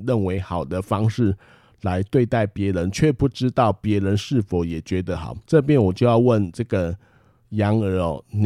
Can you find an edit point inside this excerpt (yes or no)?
yes